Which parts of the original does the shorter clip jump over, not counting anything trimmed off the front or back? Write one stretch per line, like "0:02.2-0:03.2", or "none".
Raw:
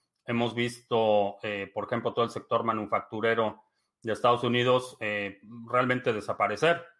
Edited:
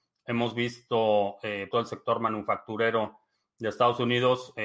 0:01.7-0:02.1